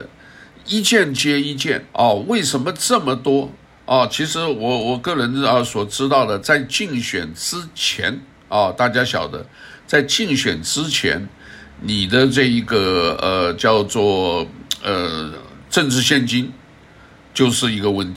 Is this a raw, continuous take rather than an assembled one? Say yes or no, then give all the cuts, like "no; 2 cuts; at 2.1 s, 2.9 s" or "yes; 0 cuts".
no; 1 cut; at 1.9 s